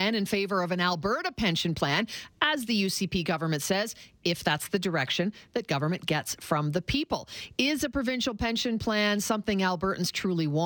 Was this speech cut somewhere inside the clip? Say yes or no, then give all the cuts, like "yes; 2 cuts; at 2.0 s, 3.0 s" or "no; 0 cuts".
no; 0 cuts